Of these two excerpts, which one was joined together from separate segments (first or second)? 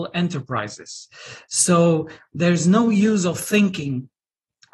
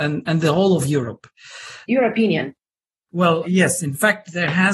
second